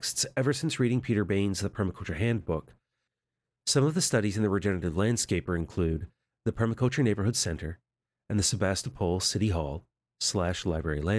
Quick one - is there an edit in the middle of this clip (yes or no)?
no